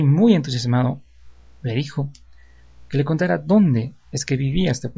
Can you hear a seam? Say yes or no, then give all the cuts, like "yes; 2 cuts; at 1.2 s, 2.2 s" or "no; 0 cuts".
no; 0 cuts